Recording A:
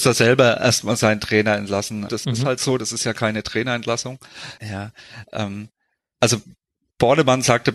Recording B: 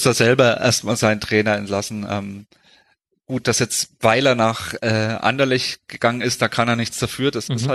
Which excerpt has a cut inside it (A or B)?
A